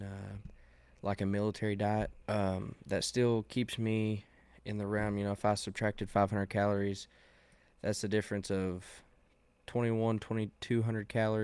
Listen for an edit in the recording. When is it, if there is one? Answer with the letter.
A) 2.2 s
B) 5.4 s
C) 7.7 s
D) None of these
A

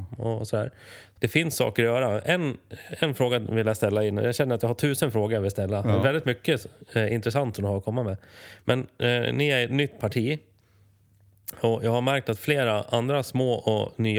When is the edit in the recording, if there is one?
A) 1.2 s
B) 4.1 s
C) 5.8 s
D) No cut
A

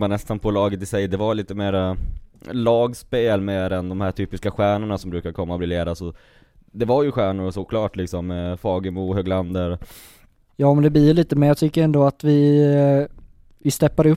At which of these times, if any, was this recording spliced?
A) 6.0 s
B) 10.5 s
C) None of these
B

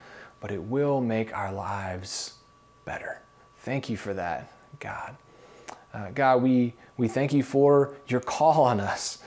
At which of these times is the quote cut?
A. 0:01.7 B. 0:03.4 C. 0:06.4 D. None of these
B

